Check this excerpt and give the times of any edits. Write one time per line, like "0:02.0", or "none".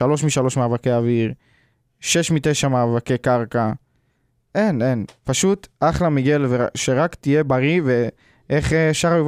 none